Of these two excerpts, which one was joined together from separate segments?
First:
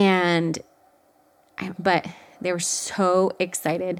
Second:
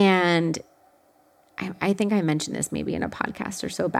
first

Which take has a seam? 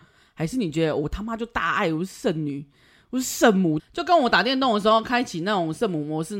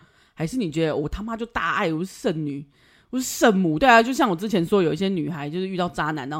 first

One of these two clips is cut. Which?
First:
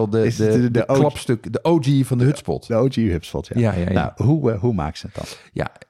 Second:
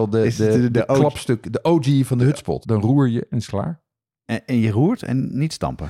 second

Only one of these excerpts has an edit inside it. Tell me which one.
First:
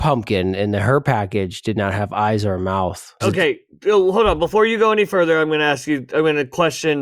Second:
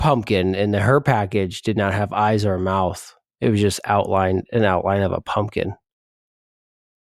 first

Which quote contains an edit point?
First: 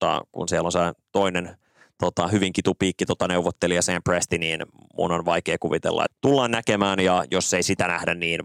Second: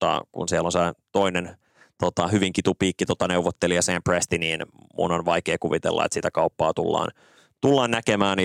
first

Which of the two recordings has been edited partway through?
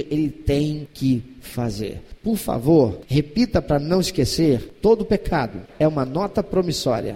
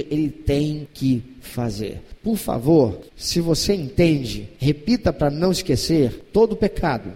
first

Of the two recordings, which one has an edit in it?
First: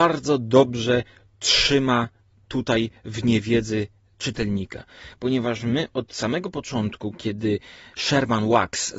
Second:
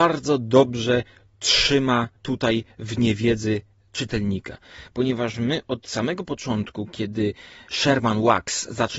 second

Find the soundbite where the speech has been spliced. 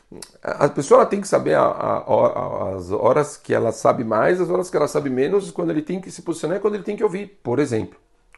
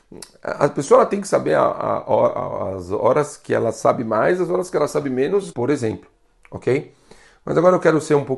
second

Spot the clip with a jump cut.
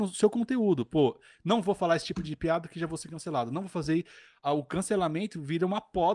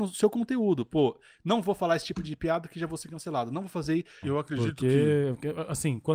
second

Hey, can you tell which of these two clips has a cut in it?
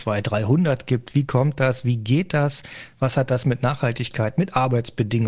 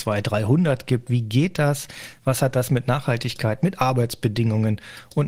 second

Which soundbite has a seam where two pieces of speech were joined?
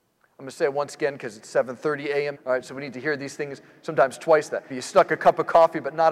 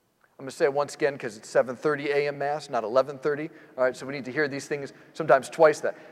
first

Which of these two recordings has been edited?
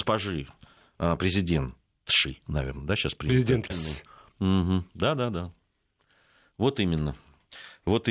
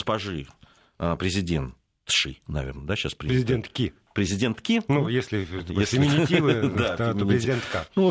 first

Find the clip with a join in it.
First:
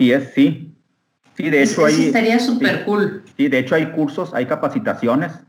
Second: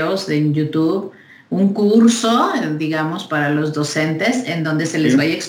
first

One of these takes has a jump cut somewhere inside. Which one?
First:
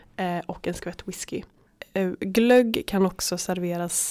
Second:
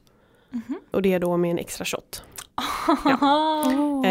second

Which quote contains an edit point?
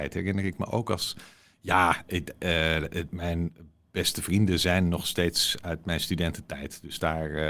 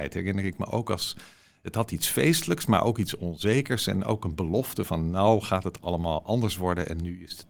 first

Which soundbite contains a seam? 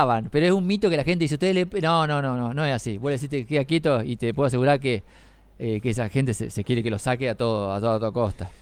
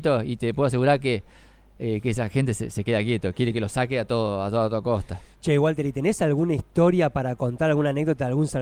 first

